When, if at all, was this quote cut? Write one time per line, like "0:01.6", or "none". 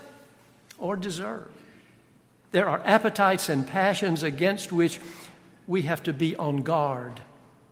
0:02.5